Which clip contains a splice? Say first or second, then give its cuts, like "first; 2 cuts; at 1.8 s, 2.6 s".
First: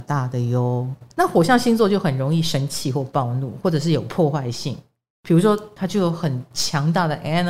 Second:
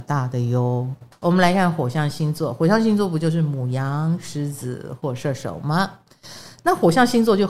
first; 2 cuts; at 1.1 s, 5.8 s